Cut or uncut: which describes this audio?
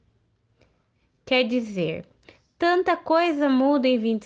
uncut